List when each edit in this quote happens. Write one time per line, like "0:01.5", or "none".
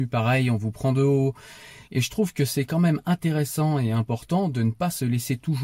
0:01.8